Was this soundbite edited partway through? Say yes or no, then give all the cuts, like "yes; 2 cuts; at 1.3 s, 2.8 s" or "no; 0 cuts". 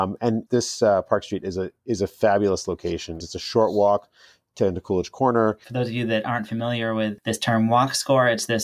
yes; 2 cuts; at 3.2 s, 5.6 s